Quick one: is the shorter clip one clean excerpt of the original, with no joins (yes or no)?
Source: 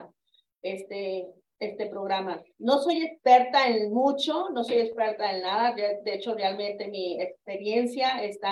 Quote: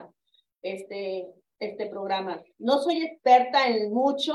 yes